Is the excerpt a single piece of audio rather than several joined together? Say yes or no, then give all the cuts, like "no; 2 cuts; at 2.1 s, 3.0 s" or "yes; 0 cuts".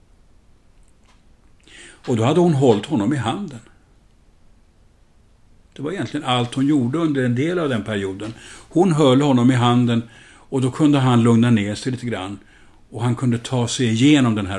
yes; 0 cuts